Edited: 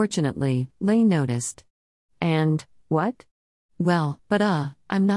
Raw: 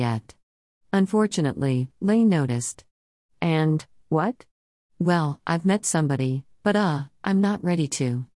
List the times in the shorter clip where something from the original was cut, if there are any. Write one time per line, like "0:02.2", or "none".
0:04.2